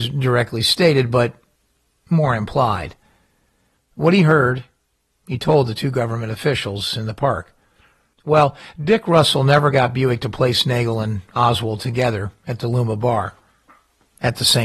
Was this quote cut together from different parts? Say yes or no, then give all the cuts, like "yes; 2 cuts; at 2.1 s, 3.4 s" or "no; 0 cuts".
yes; 2 cuts; at 3.8 s, 8.1 s